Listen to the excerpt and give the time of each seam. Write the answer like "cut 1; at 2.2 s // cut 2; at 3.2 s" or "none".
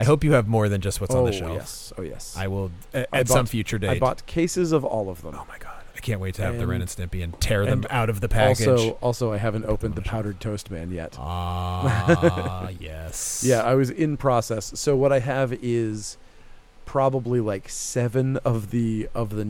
none